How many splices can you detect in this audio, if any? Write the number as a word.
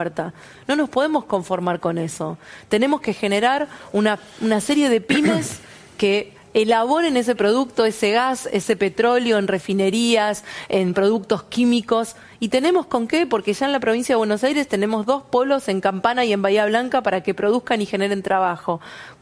zero